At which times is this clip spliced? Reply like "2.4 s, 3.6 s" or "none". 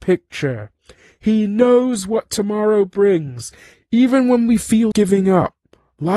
3.7 s, 4.9 s